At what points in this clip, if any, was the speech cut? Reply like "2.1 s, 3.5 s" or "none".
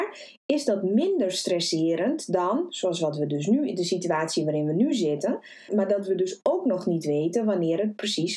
5.7 s